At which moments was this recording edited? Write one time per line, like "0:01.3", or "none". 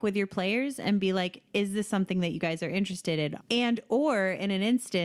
0:03.4